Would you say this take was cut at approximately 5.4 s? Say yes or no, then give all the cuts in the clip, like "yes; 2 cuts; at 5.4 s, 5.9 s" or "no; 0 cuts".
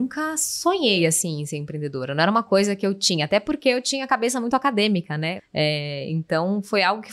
yes; 1 cut; at 5.4 s